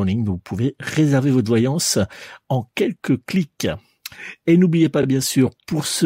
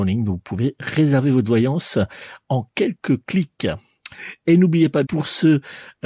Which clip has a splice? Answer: second; 1 cut; at 5.0 s

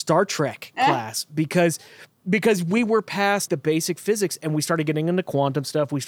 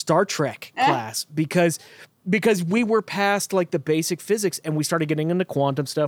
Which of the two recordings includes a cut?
first; 1 cut; at 3.5 s

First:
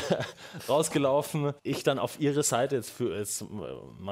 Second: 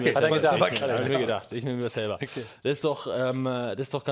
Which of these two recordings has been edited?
first; 1 cut; at 1.6 s

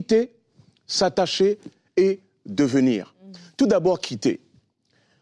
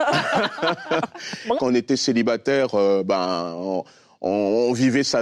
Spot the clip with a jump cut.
second; 1 cut; at 1.6 s

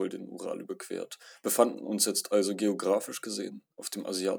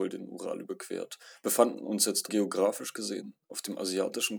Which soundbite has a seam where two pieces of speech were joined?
second; 1 cut; at 2.3 s

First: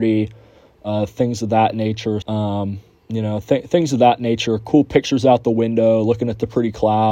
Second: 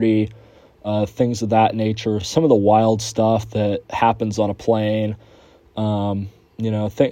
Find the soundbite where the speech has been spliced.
first; 1 cut; at 2.2 s

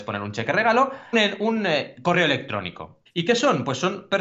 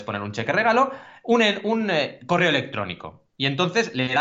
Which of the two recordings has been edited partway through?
first; 2 cuts; at 1.1 s, 3.1 s

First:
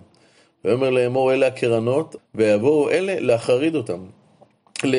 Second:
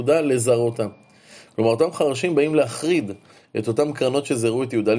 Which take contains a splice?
first; 1 cut; at 2.2 s

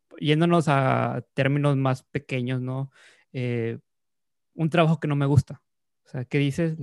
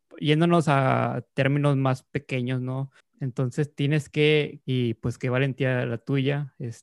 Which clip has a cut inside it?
second; 2 cuts; at 3.0 s, 4.6 s

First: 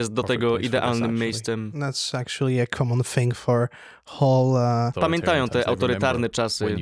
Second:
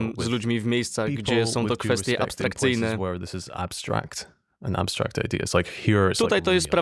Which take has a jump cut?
first; 1 cut; at 4.9 s

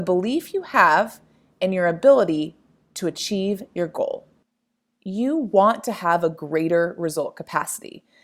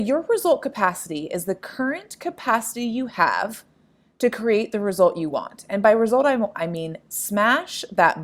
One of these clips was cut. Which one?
second; 1 cut; at 6.5 s

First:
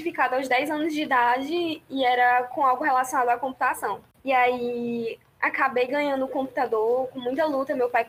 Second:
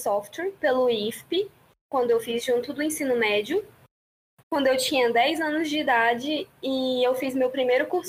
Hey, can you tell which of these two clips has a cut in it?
second; 1 cut; at 4.4 s

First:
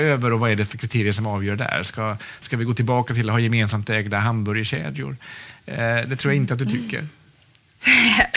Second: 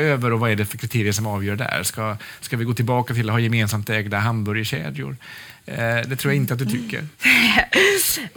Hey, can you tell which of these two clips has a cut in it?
second; 1 cut; at 7.1 s

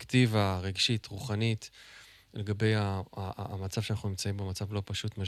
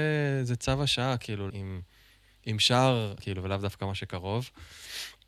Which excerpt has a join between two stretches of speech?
second; 2 cuts; at 1.5 s, 3.2 s

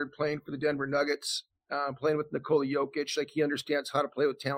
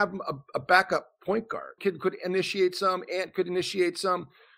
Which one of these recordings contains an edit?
second; 1 cut; at 1.8 s

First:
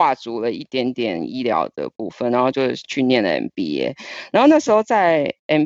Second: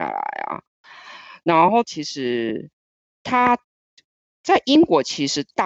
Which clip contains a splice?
second; 1 cut; at 1.8 s

